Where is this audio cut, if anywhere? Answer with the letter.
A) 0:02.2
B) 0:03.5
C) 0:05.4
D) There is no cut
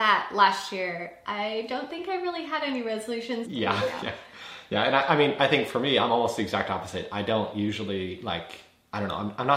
B